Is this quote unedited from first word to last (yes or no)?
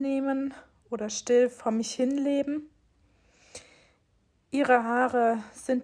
yes